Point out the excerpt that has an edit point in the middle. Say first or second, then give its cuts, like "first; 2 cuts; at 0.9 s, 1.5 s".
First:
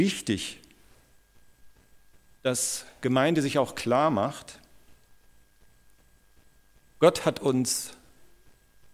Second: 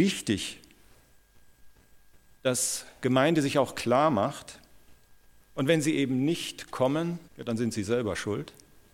second; 2 cuts; at 5.4 s, 7.3 s